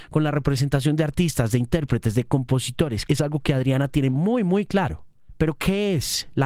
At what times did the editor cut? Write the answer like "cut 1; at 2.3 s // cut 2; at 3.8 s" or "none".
cut 1; at 3.1 s // cut 2; at 5.3 s